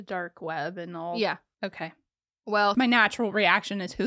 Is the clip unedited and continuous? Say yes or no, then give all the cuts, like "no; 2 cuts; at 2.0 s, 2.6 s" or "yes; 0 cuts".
no; 2 cuts; at 1.5 s, 2.7 s